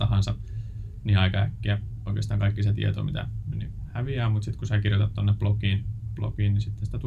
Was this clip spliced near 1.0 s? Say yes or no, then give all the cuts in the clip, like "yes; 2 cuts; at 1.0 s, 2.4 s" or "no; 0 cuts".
no; 1 cut; at 3.5 s